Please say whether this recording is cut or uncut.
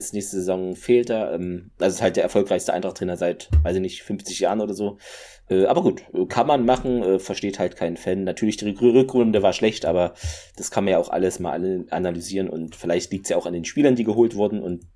uncut